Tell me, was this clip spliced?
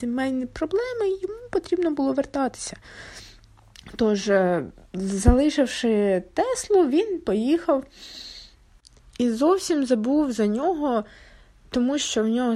no; 0 cuts

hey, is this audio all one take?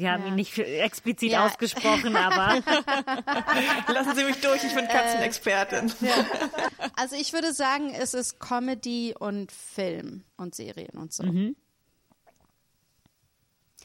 no; 1 cut; at 10.3 s

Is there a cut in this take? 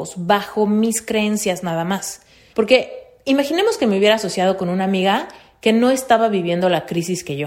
yes; 1 cut; at 2.5 s

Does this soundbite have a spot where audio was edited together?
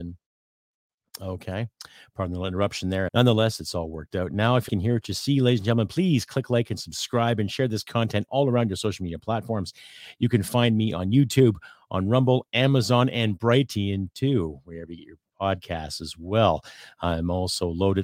yes; 2 cuts; at 3.1 s, 4.7 s

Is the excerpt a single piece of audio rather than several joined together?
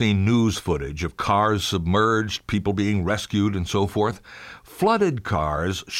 yes; 0 cuts

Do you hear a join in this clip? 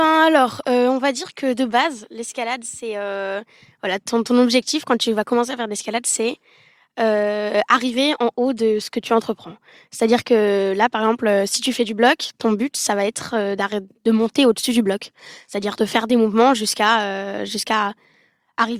no; 0 cuts

